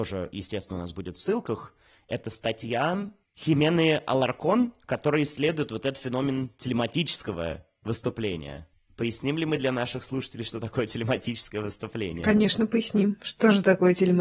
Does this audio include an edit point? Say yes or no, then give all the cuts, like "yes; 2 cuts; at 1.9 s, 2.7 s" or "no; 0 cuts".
no; 0 cuts